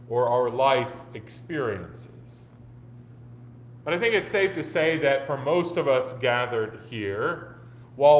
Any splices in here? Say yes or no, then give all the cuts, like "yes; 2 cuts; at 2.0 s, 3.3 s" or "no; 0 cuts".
yes; 1 cut; at 3.8 s